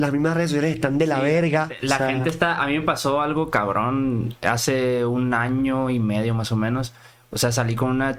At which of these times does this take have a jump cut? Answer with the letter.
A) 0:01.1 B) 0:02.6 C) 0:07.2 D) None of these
D